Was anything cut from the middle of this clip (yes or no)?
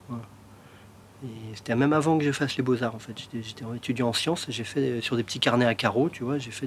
no